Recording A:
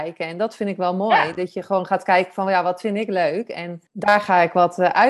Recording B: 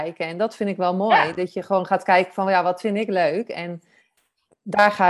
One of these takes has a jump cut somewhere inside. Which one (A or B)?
A